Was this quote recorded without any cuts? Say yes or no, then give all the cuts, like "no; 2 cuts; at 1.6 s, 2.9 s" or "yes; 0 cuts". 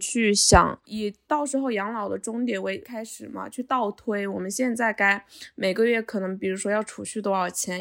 yes; 0 cuts